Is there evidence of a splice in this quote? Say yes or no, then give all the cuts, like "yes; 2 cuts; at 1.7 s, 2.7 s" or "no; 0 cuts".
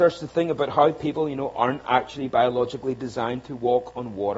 no; 0 cuts